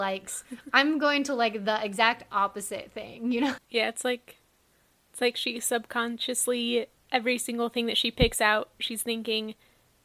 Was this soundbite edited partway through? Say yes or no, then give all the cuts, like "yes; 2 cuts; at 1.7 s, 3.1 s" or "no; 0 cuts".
yes; 1 cut; at 3.6 s